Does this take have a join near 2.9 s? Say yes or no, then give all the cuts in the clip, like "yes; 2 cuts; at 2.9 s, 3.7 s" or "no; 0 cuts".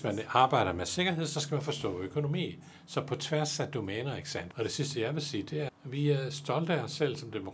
no; 2 cuts; at 4.5 s, 5.7 s